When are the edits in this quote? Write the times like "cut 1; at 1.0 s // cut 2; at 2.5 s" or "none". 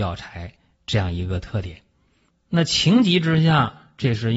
cut 1; at 2.3 s